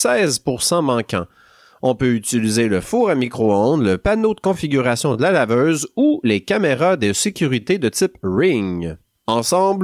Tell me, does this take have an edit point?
no; 0 cuts

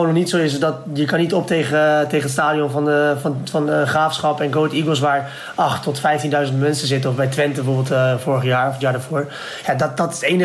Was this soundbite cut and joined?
no; 0 cuts

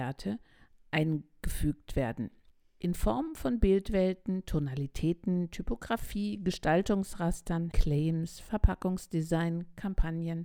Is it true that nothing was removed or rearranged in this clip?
no; 1 cut; at 7.7 s

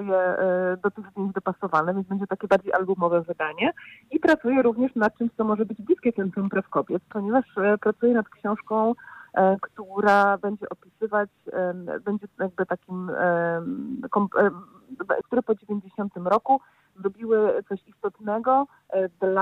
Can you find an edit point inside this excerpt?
yes; 1 cut; at 15.2 s

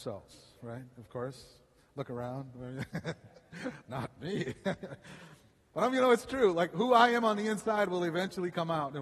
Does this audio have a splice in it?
no; 0 cuts

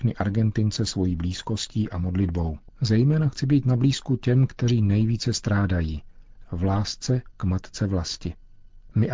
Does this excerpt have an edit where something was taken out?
yes; 2 cuts; at 2.7 s, 6.4 s

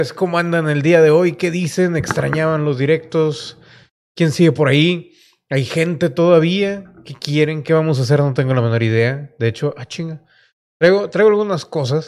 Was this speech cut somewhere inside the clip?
no; 0 cuts

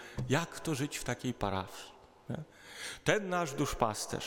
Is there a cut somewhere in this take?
no; 0 cuts

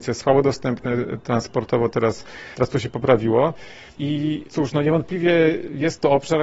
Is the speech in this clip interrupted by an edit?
yes; 1 cut; at 4.0 s

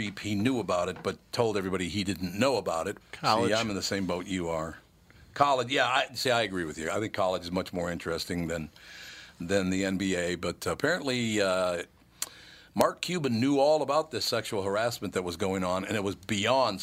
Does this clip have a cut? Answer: yes; 1 cut; at 3.0 s

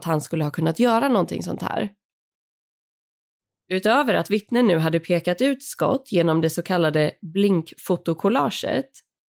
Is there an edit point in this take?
no; 0 cuts

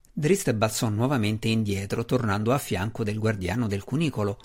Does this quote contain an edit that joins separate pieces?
no; 0 cuts

